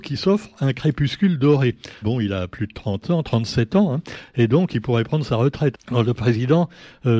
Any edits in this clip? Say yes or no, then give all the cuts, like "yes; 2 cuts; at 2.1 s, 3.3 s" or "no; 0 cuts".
yes; 2 cuts; at 2.0 s, 5.7 s